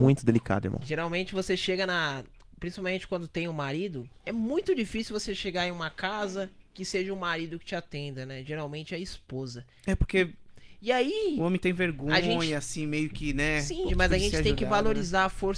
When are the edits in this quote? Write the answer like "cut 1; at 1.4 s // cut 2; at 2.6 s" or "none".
cut 1; at 13.9 s

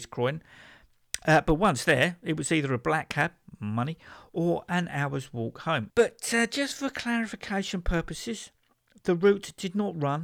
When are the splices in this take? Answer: cut 1; at 5.9 s

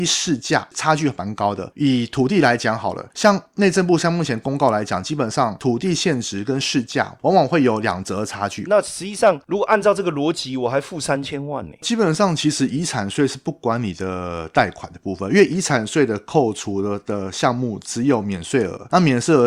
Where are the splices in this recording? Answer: cut 1; at 8.7 s

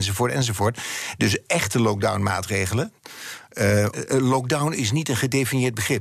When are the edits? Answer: cut 1; at 3.9 s

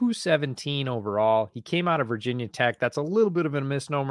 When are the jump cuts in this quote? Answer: none

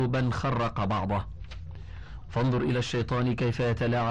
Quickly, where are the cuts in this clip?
cut 1; at 2.2 s

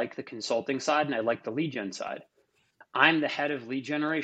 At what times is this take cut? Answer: cut 1; at 2.8 s

